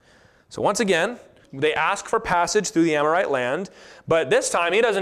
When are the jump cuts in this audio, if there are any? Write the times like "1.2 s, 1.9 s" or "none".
1.4 s